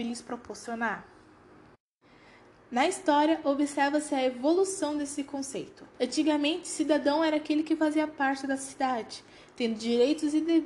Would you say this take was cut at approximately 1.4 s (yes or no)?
no